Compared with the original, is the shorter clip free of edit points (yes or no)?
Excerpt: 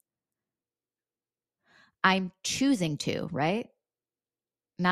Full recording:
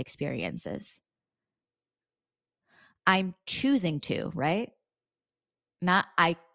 yes